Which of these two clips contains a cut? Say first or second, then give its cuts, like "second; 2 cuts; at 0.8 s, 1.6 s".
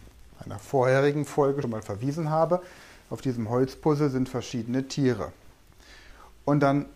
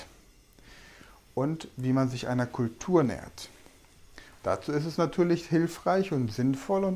first; 1 cut; at 1.6 s